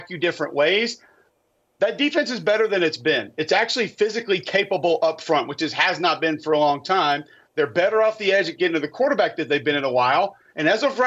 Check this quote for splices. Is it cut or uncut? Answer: uncut